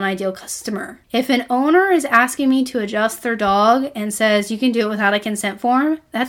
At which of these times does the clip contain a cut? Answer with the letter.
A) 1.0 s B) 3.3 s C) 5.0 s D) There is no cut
A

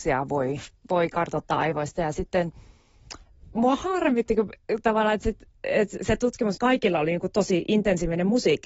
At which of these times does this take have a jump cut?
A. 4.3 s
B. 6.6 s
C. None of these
B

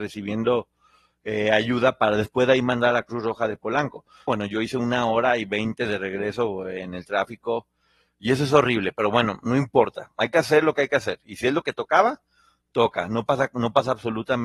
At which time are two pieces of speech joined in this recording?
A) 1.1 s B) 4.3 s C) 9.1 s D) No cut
B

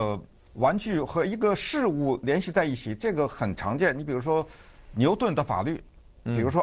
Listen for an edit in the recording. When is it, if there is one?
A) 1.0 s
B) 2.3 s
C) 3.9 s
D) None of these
D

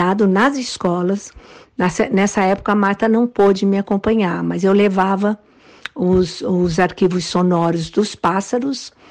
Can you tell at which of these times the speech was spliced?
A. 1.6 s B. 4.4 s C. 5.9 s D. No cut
A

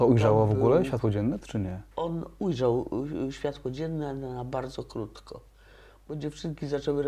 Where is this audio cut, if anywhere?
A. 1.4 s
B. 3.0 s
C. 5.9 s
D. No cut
A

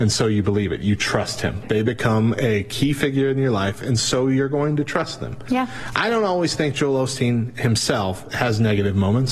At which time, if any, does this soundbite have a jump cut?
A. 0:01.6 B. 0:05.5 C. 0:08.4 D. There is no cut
A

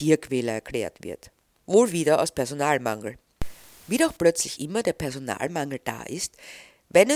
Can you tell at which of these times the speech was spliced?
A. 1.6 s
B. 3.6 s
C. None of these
A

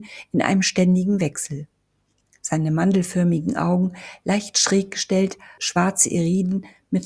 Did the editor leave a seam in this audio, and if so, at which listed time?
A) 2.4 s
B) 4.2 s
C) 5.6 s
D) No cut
C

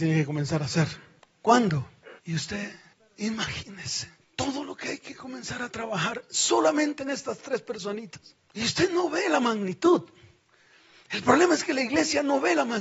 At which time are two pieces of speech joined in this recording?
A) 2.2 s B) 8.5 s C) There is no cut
A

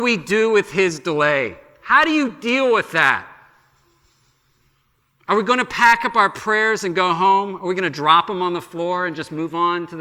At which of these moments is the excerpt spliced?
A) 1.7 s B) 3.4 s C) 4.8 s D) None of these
D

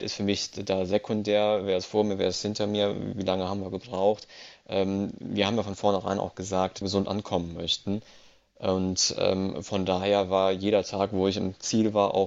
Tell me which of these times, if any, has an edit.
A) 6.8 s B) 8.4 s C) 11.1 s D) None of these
A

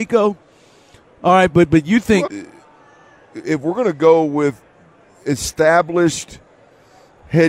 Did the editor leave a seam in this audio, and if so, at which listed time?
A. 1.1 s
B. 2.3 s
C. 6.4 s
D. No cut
B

